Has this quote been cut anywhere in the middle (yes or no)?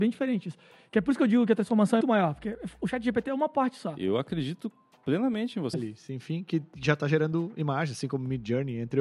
yes